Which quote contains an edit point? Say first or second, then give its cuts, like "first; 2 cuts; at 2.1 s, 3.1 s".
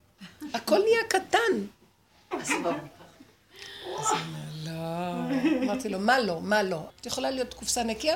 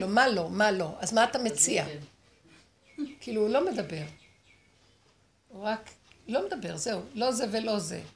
first; 2 cuts; at 2.3 s, 6.9 s